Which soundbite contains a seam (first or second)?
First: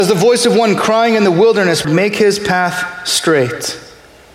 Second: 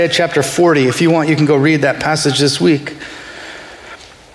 first